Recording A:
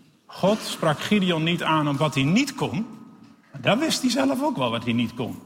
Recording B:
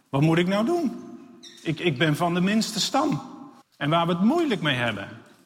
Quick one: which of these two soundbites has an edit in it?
B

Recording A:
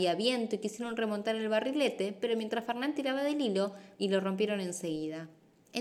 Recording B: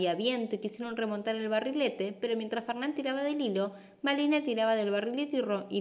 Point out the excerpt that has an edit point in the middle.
A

